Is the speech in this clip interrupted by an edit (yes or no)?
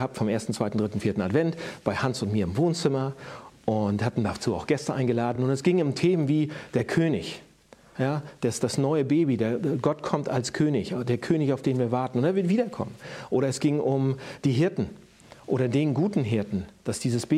no